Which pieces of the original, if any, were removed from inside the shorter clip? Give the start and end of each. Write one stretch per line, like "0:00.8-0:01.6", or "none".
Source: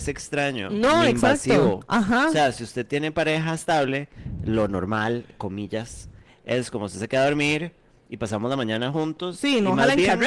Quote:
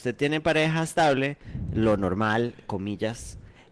none